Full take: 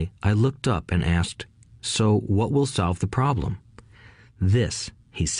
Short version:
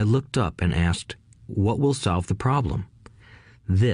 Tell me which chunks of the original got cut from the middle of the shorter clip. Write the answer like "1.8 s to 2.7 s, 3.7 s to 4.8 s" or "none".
1.8 s to 2.2 s